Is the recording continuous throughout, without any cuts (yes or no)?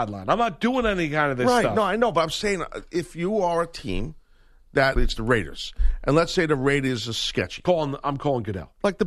no